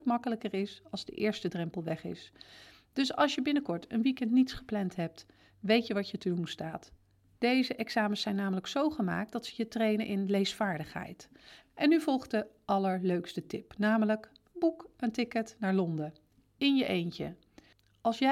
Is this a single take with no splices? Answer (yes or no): no